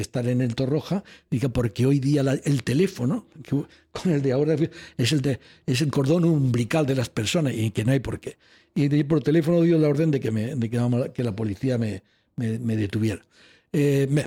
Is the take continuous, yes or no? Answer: yes